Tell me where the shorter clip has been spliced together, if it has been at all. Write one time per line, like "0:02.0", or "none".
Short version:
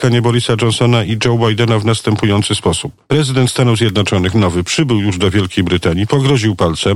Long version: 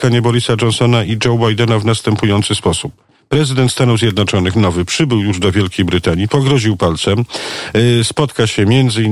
0:03.0